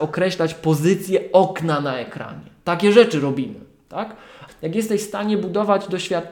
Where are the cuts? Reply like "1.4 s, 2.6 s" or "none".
4.5 s